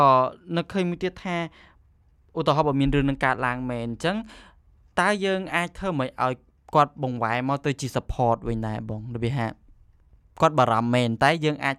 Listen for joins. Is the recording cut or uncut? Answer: uncut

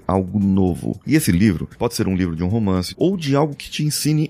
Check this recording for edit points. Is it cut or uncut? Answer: cut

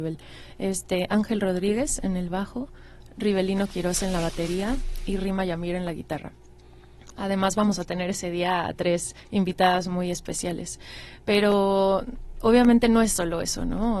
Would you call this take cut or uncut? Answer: uncut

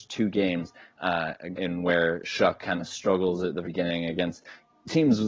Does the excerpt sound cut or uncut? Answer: cut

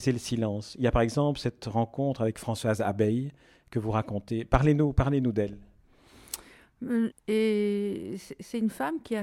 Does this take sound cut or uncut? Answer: cut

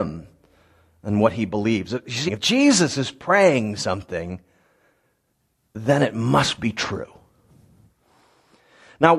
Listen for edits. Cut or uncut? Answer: cut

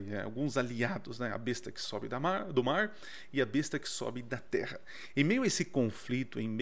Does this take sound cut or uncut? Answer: uncut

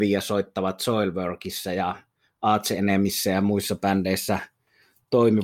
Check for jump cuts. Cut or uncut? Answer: uncut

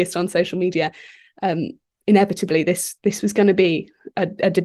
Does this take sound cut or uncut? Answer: uncut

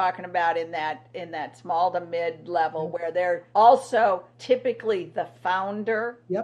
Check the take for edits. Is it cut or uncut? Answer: uncut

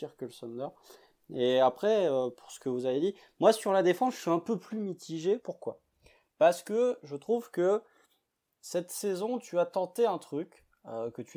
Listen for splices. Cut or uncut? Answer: uncut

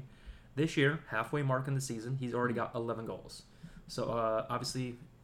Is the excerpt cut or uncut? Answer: uncut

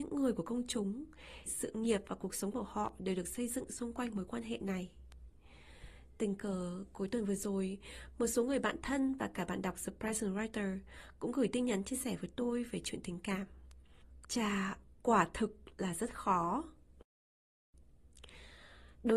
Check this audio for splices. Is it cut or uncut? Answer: cut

